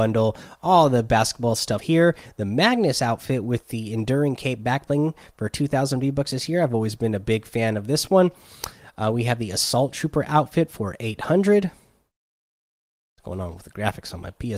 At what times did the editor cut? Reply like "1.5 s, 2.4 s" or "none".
1.8 s